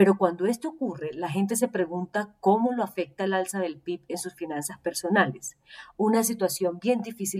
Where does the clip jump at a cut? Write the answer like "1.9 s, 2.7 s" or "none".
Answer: none